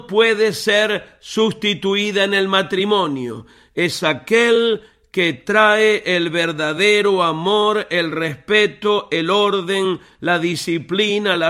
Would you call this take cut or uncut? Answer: uncut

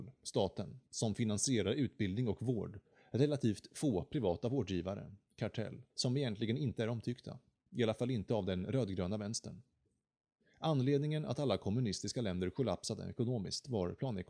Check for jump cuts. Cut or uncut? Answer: cut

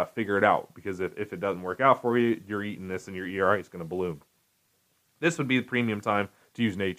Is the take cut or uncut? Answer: uncut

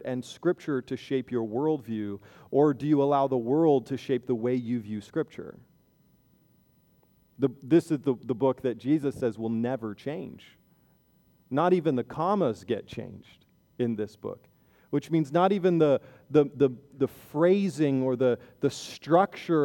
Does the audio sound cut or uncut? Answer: uncut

